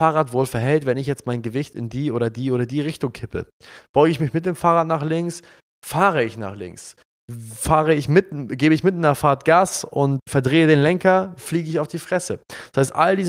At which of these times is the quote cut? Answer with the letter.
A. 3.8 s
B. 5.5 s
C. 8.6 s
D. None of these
A